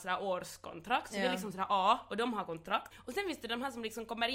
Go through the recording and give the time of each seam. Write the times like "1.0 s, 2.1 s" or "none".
2.9 s

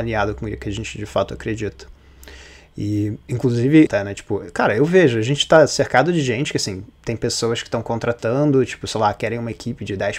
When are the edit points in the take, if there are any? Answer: 3.9 s

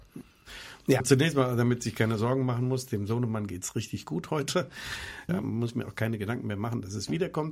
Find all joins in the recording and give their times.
1.0 s, 5.3 s

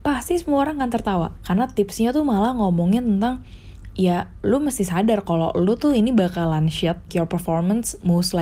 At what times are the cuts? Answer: 1.4 s, 7.1 s

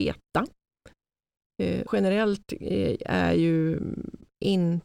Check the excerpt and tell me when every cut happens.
1.9 s

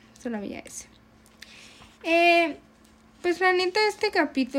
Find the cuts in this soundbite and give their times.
none

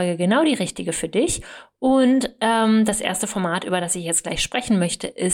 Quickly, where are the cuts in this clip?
none

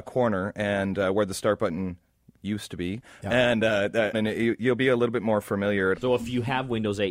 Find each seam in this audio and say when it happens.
4.1 s, 5.9 s

